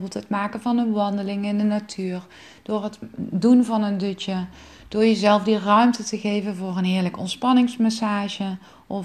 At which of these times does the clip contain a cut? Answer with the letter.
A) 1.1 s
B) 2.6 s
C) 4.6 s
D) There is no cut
D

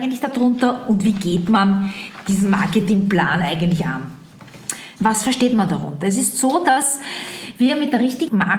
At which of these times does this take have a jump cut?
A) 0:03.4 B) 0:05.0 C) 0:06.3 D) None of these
B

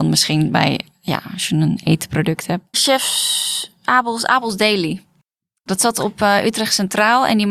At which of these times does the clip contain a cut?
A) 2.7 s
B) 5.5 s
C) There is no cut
A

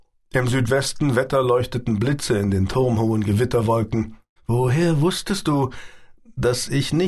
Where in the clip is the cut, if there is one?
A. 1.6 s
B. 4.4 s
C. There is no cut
B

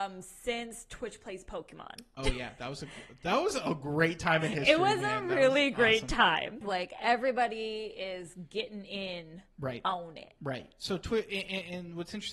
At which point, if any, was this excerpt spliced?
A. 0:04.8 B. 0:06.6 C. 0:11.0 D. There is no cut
B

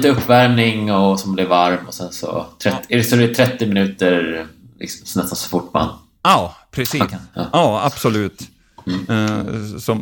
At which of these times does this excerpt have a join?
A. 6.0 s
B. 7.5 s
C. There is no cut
B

